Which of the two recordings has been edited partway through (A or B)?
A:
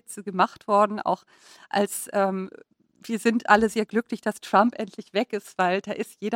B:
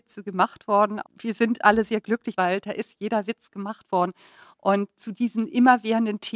B